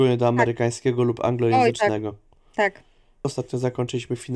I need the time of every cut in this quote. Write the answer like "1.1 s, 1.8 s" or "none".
3.2 s